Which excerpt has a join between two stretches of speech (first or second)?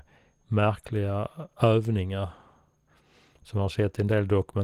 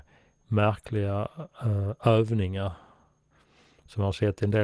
first